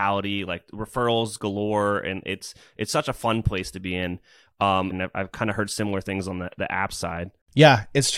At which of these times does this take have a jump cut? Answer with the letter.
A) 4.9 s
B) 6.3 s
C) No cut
A